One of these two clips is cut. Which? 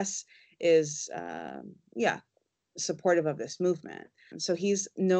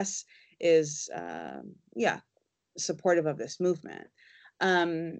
first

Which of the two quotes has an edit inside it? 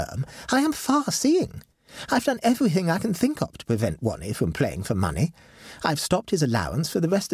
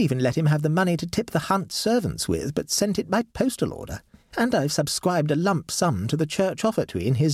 second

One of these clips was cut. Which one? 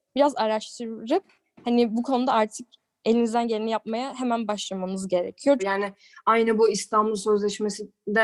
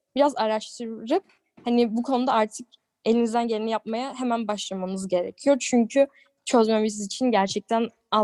first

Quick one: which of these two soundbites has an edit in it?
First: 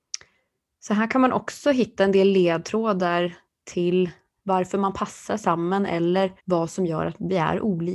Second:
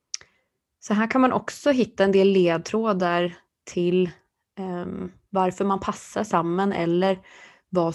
first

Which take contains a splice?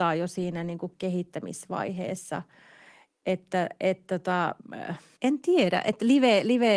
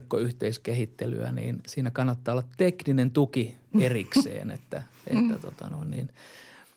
first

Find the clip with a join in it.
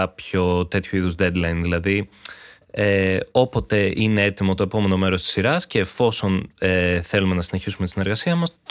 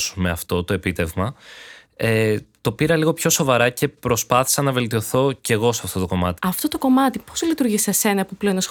second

